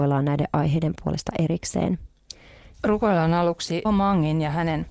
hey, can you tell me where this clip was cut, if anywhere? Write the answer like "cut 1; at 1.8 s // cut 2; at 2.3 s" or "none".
cut 1; at 2.7 s // cut 2; at 3.8 s

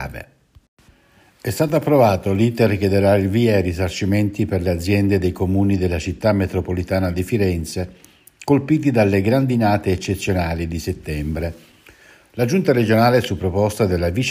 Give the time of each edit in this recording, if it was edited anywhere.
none

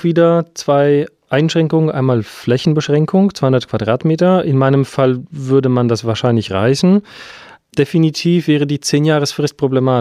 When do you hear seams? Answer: none

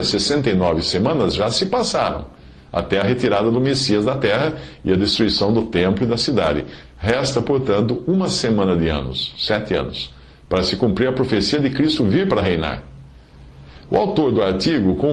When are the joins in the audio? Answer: none

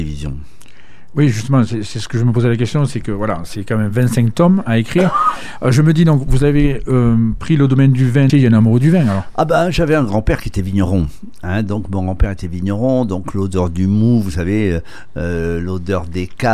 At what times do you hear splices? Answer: cut 1; at 8.3 s

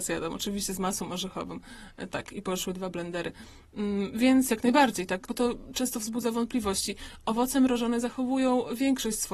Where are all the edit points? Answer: cut 1; at 5.3 s

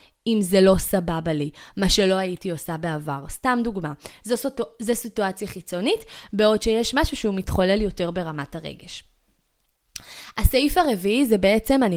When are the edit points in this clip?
none

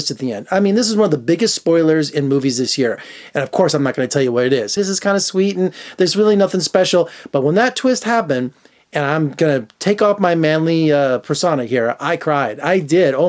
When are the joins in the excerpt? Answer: cut 1; at 4.8 s

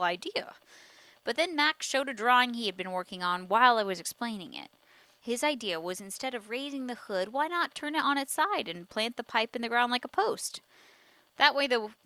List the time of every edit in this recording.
cut 1; at 5.2 s

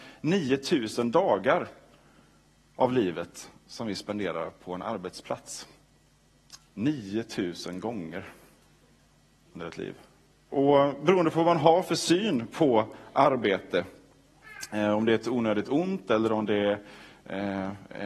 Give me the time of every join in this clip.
cut 1; at 6.7 s // cut 2; at 10.5 s

